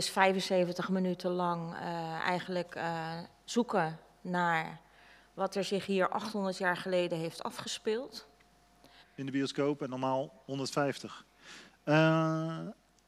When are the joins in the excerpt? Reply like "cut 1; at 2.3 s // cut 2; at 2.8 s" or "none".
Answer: cut 1; at 9.0 s